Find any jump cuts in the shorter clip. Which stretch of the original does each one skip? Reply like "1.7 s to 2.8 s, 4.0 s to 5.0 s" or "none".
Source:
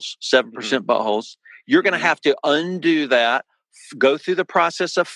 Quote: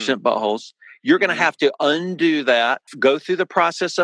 3.5 s to 3.9 s